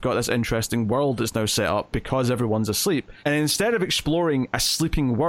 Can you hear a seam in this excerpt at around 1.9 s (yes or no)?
no